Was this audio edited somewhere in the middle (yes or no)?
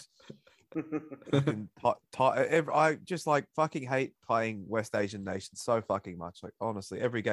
no